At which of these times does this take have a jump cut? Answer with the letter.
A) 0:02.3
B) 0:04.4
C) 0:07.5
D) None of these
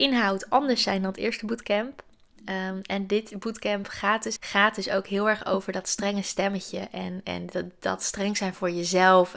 B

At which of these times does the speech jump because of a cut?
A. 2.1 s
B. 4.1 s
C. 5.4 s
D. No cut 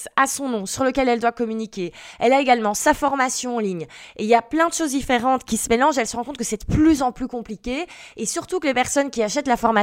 C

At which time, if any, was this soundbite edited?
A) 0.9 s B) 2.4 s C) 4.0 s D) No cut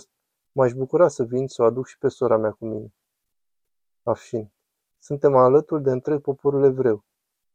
D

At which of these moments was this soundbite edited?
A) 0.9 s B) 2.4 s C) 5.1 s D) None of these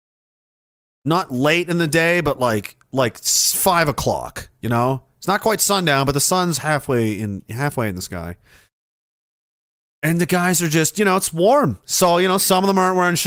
D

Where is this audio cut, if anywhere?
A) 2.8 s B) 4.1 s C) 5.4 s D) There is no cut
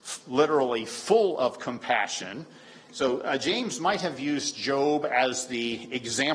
A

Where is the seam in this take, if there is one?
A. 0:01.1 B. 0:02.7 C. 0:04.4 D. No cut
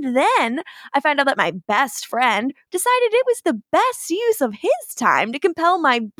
B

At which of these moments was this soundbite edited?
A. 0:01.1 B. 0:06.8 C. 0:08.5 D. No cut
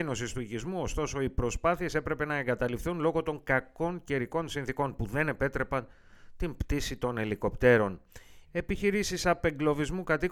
C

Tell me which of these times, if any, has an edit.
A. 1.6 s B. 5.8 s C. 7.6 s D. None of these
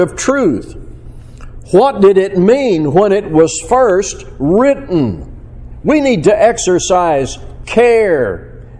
A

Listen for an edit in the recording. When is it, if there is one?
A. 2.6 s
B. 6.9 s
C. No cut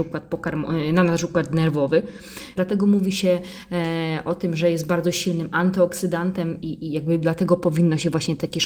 A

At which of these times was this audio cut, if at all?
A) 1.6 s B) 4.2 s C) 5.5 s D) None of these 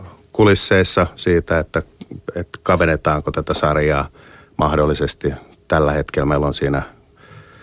D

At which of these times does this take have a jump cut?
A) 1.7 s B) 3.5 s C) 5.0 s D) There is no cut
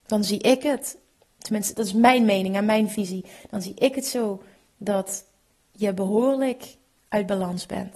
A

